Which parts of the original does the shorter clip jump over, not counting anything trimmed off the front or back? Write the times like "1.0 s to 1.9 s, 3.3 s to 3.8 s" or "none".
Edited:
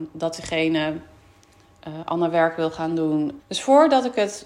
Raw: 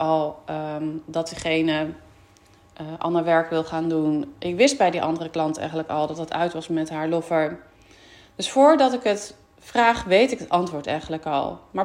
4.3 s to 8.3 s